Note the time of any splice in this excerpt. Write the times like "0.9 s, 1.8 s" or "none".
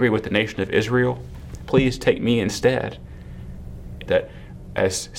1.7 s, 4.1 s